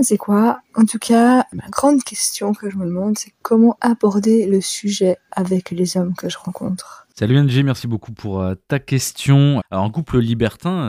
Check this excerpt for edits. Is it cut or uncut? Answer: cut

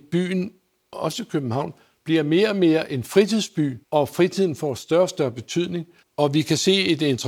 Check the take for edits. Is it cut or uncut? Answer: cut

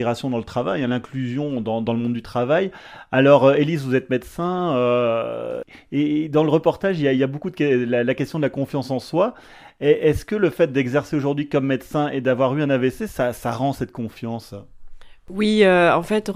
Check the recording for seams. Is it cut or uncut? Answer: uncut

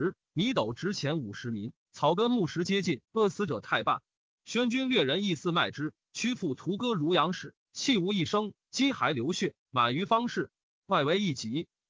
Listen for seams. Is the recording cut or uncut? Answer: cut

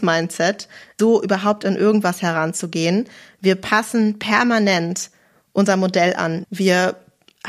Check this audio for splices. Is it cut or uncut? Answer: cut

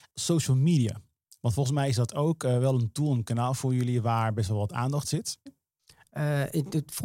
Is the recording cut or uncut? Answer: cut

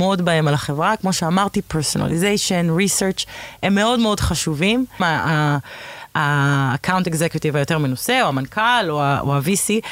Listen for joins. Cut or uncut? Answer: cut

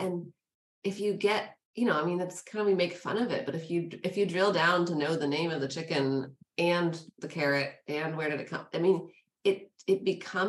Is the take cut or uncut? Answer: cut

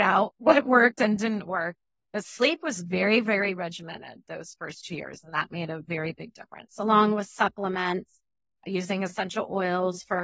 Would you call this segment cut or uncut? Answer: uncut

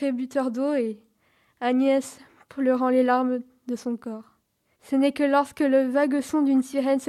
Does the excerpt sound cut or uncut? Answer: cut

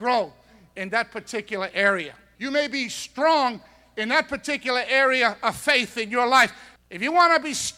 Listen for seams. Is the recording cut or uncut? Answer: cut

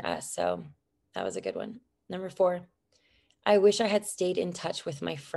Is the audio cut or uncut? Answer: uncut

